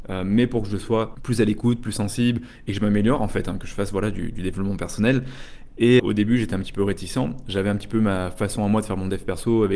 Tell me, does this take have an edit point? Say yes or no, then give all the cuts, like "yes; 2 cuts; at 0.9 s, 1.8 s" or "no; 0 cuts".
yes; 1 cut; at 6.0 s